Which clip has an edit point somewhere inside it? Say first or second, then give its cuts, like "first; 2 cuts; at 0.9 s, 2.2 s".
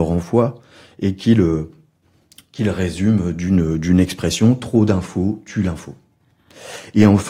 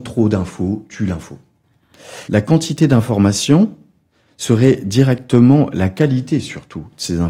second; 1 cut; at 2.2 s